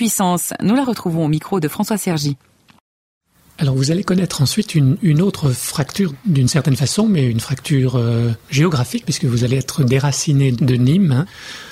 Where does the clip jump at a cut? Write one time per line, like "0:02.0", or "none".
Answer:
0:09.0